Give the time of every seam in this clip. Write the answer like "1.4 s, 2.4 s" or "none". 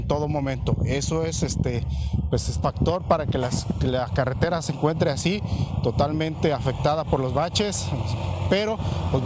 2.6 s

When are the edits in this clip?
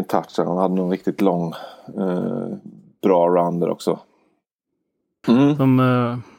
5.2 s

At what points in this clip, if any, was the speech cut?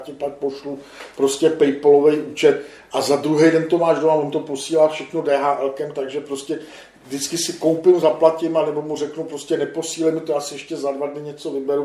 none

